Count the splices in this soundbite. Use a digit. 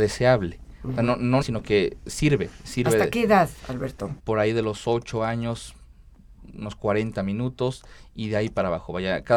2